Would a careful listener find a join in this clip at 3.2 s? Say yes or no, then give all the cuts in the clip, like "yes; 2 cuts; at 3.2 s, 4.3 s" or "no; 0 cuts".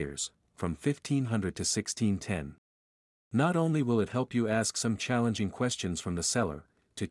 yes; 1 cut; at 3.2 s